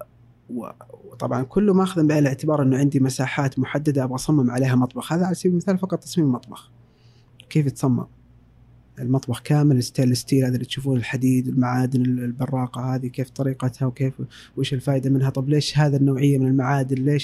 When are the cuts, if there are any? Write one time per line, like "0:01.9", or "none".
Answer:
none